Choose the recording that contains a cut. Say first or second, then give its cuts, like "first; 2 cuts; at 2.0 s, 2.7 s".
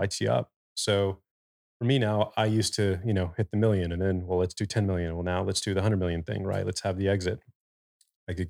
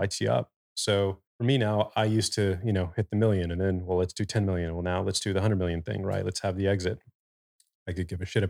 second; 1 cut; at 1.3 s